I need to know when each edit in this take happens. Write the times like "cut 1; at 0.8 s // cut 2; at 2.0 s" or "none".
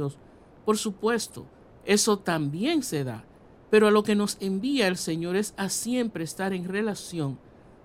none